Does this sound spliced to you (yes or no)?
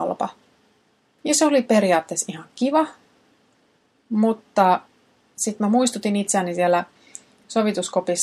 yes